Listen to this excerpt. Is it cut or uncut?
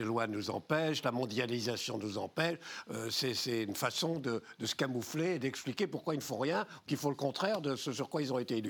uncut